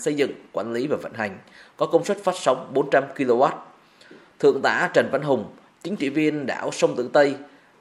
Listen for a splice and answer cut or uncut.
uncut